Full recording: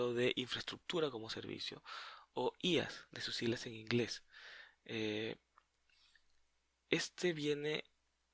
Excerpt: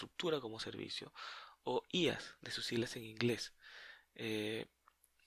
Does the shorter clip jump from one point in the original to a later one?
no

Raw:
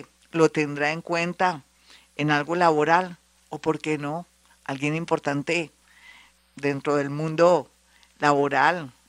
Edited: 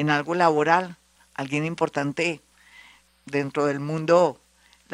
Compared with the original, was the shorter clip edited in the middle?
yes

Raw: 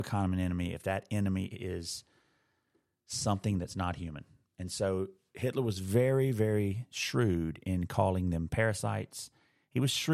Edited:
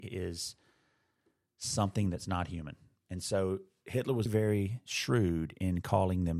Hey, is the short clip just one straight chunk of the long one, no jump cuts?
no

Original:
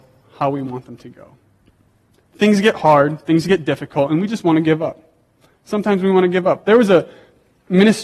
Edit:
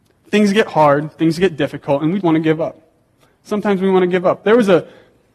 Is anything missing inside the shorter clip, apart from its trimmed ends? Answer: yes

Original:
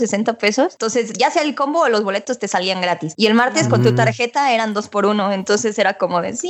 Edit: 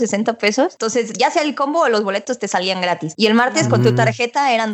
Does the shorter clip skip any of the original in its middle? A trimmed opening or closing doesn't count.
no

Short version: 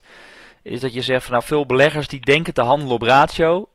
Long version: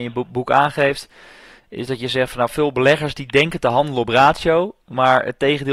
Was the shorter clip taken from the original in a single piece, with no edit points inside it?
yes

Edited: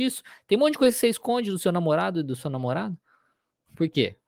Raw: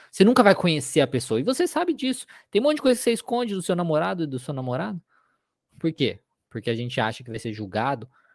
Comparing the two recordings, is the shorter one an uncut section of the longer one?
yes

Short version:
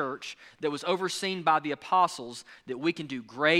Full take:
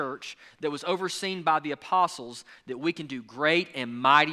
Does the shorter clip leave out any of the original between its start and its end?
no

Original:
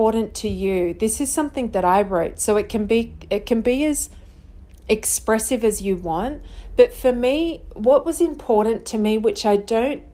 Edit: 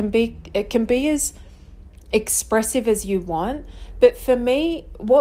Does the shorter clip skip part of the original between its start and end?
no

